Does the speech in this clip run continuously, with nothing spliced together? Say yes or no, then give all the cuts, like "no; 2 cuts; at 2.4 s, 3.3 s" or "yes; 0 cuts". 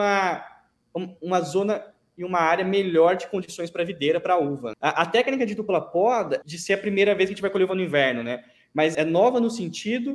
no; 3 cuts; at 4.7 s, 6.4 s, 8.9 s